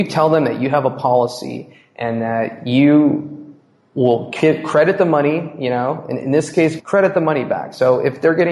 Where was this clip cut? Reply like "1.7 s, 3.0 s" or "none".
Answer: 6.8 s